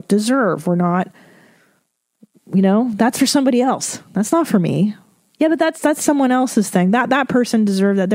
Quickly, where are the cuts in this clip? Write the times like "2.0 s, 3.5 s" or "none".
none